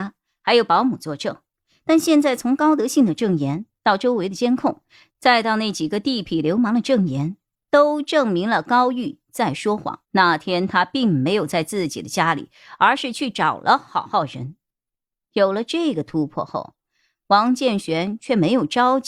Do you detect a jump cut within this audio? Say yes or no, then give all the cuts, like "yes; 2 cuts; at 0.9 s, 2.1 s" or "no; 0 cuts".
yes; 2 cuts; at 7.7 s, 10.0 s